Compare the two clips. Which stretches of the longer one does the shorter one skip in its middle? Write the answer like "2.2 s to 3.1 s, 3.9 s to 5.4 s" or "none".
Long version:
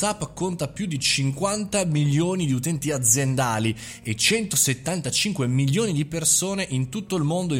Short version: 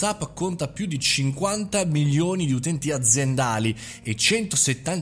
none